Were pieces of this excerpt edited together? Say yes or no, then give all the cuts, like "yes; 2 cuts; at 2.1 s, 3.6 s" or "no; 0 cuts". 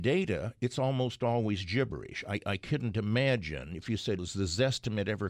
yes; 1 cut; at 4.2 s